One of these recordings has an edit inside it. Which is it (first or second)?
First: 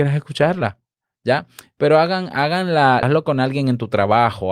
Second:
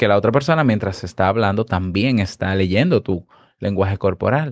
first